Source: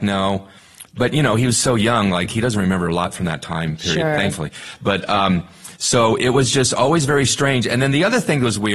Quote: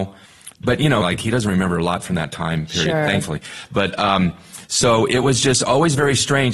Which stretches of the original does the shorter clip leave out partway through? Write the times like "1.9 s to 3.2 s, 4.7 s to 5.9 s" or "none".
1.3 s to 2.1 s

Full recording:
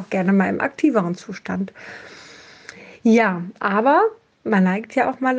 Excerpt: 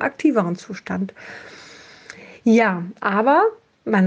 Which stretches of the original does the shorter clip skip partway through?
none

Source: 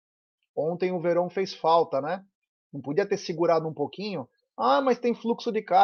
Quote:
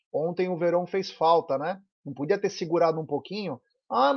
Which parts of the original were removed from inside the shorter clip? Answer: 2.4 s to 2.6 s

